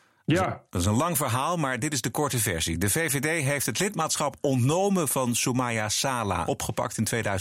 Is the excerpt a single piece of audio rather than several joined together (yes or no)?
no